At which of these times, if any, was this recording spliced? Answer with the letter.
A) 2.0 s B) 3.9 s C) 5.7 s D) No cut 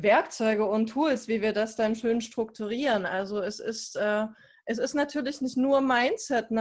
D